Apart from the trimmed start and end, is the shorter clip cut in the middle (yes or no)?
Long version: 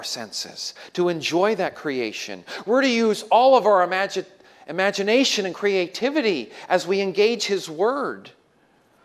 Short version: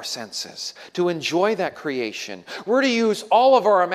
no